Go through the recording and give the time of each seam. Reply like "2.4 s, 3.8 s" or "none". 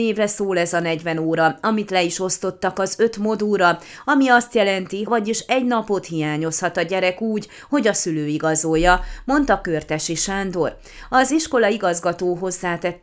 5.0 s